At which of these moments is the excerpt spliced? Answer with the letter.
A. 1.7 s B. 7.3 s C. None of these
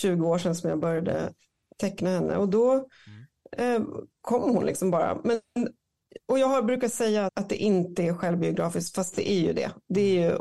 B